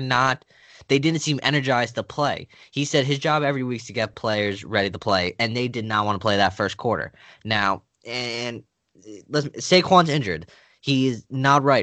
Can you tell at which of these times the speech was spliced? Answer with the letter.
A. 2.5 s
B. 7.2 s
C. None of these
C